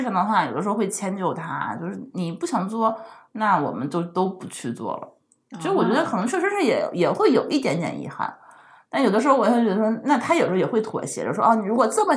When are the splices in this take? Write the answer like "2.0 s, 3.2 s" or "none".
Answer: none